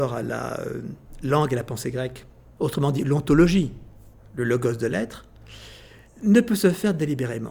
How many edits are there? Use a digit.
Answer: 1